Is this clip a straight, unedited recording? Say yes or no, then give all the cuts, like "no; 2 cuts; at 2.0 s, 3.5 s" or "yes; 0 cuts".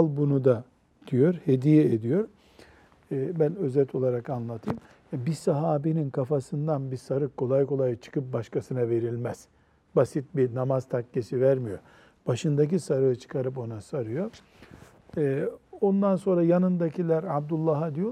yes; 0 cuts